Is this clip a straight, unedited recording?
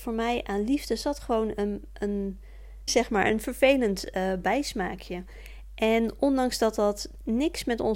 no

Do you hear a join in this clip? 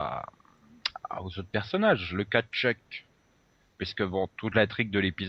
no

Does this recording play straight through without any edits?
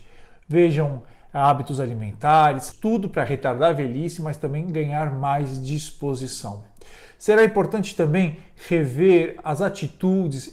no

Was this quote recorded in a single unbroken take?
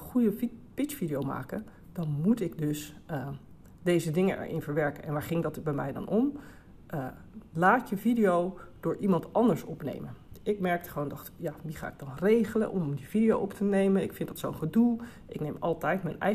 yes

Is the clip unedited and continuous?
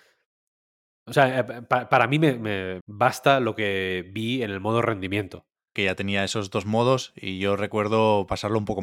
no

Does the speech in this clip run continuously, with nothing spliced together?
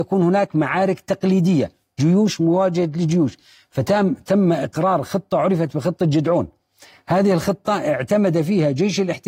yes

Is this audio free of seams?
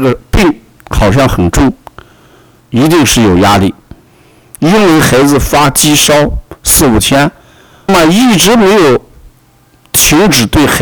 no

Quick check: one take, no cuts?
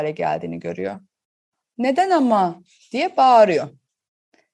no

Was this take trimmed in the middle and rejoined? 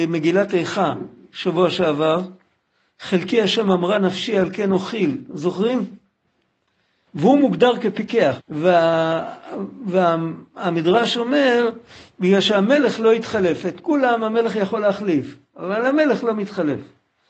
yes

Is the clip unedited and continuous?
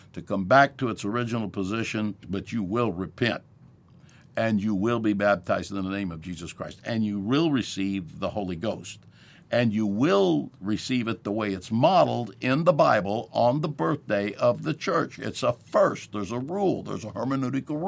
no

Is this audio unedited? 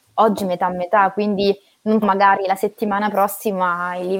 no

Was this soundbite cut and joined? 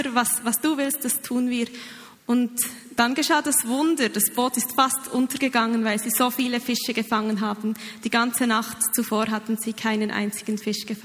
yes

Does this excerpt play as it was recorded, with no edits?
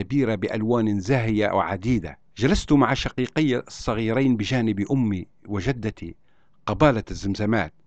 no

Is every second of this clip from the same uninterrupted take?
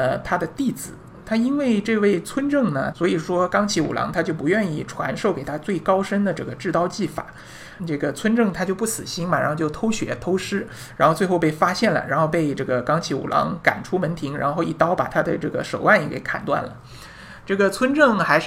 no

